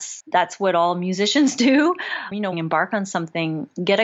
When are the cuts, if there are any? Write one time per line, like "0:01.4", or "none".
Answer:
0:02.5